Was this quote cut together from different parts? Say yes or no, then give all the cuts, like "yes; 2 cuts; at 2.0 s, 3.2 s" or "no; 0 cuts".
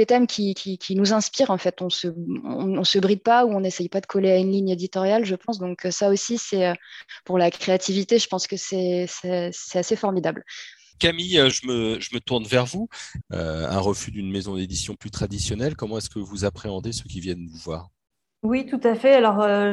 yes; 3 cuts; at 11.5 s, 13.2 s, 15.0 s